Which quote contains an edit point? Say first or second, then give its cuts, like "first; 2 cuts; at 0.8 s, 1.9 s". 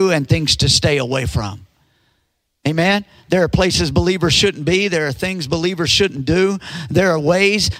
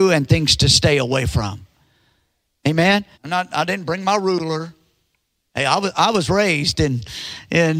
second; 1 cut; at 3.1 s